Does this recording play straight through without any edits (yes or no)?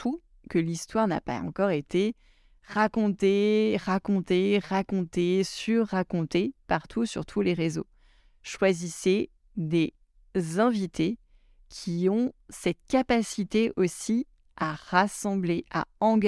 yes